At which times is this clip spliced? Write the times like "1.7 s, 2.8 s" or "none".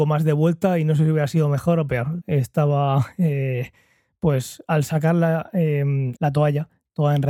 2.2 s, 6.2 s